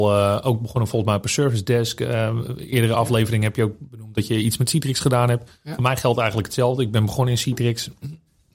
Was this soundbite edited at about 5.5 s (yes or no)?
no